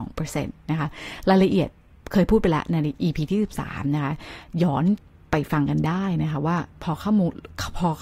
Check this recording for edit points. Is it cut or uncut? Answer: cut